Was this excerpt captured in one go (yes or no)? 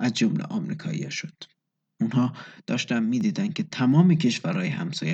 no